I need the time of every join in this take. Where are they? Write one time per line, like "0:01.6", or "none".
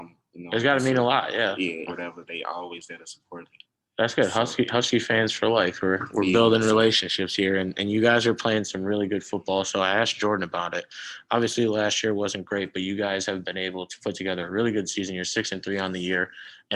0:01.9

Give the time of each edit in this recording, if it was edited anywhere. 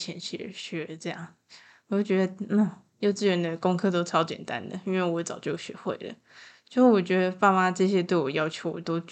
none

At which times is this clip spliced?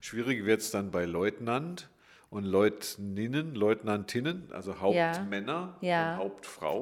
none

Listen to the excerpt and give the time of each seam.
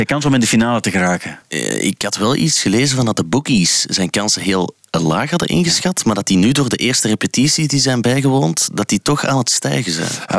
none

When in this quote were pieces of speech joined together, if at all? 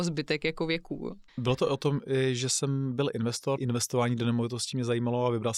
0:01.3
0:03.6

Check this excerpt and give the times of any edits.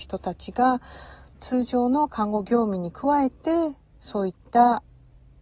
0:01.3

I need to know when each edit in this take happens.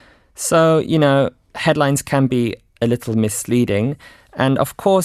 none

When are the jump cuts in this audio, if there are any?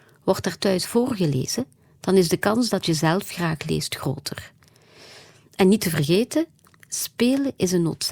none

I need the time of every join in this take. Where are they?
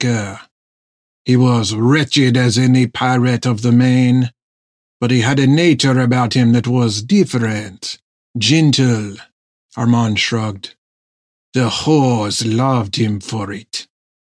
none

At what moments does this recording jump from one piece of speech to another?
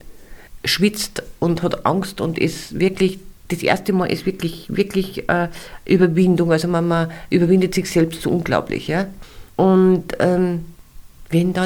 none

